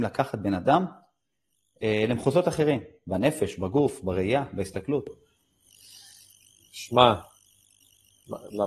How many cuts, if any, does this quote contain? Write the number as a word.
zero